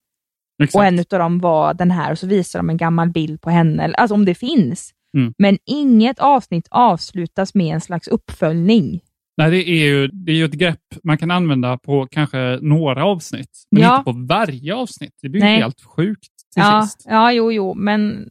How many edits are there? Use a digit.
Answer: 1